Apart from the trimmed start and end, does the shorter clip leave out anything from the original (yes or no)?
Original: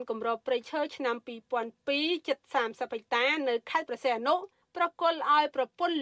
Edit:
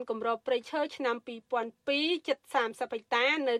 no